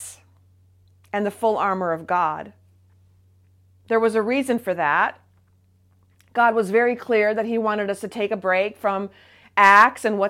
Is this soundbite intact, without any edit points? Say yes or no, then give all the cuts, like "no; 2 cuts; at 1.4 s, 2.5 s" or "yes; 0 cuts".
yes; 0 cuts